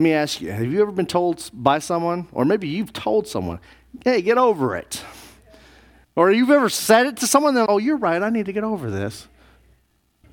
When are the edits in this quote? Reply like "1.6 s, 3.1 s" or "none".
6.0 s, 7.7 s